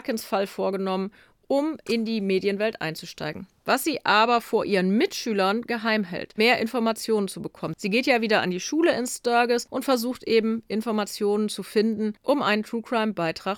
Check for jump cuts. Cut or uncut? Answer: cut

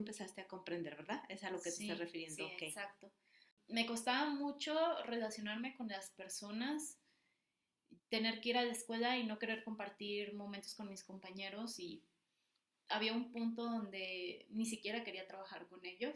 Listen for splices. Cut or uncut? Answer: cut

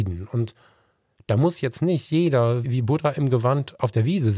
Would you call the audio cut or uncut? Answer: cut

